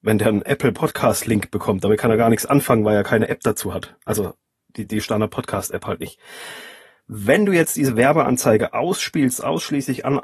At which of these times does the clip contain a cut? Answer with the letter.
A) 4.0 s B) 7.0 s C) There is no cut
C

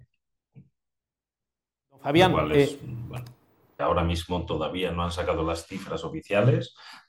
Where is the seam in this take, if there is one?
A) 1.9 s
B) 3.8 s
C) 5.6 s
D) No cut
B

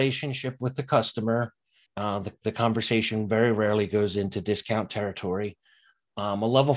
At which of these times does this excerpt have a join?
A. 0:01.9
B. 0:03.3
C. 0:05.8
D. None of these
A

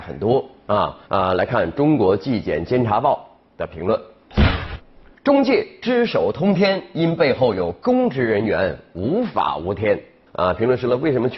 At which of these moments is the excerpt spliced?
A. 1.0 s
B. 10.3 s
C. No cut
A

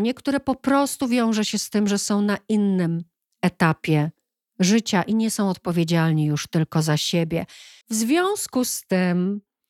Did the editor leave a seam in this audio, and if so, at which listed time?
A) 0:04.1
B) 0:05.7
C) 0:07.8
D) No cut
C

